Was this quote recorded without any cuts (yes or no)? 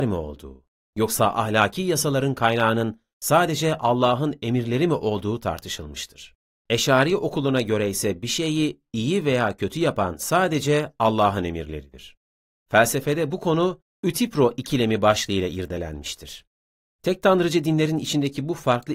no